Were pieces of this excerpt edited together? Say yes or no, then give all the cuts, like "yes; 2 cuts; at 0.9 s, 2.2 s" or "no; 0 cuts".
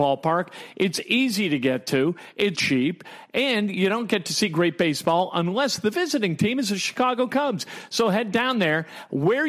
yes; 1 cut; at 2.5 s